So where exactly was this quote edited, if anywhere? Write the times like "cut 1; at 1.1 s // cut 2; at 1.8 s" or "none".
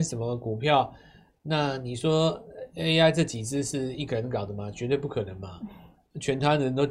none